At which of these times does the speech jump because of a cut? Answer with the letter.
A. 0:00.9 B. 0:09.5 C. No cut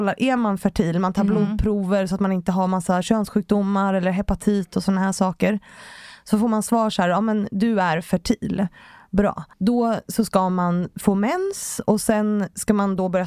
B